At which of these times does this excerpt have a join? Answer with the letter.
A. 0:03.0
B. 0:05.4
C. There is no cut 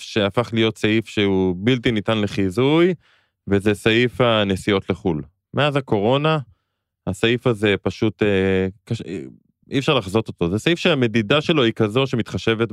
C